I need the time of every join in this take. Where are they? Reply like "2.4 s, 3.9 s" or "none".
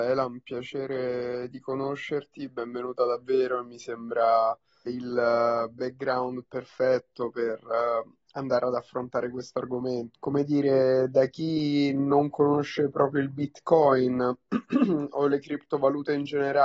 4.9 s, 10.1 s